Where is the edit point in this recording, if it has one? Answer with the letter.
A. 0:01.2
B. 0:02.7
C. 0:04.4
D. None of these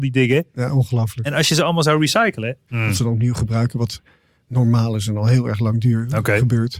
B